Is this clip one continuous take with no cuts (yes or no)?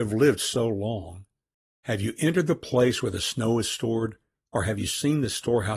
yes